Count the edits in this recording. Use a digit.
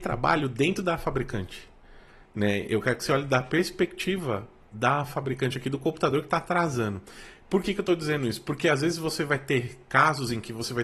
0